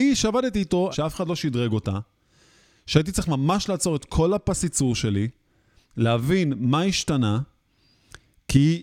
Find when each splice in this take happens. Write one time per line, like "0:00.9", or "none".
0:00.9